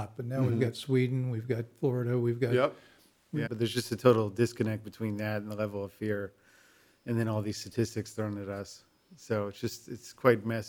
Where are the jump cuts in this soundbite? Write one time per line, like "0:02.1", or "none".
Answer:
0:03.5